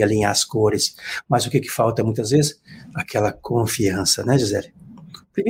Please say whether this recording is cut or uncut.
uncut